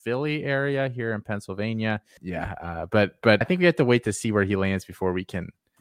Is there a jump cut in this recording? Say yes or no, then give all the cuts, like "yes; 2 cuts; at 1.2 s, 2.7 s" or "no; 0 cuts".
yes; 2 cuts; at 2.2 s, 3.4 s